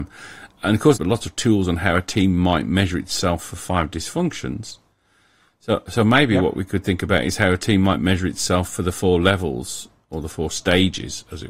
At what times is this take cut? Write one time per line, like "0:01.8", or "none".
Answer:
0:01.0